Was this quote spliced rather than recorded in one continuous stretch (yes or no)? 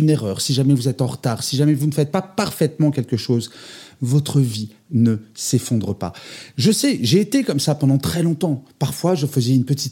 no